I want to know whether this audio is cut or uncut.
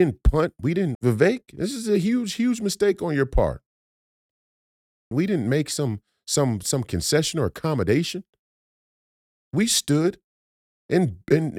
cut